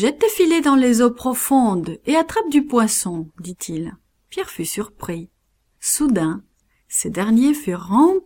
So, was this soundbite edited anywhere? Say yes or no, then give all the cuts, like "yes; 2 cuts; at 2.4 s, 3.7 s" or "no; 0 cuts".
yes; 1 cut; at 5.7 s